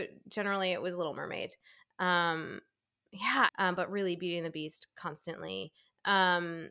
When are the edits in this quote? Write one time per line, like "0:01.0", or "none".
0:03.5